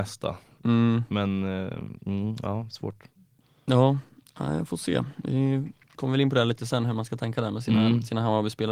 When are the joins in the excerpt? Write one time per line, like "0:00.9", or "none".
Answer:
none